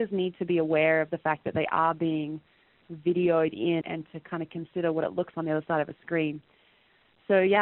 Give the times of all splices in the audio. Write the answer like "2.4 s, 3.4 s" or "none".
3.8 s, 5.3 s